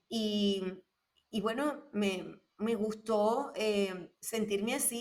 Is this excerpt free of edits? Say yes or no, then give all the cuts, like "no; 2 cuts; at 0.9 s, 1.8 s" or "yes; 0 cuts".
yes; 0 cuts